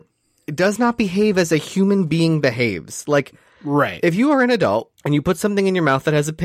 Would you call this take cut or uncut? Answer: cut